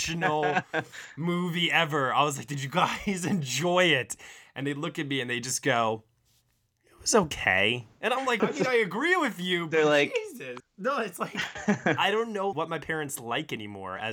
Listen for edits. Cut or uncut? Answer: cut